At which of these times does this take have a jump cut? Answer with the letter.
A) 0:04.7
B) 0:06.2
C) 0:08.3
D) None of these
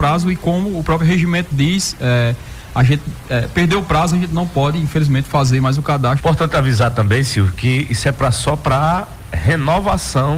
B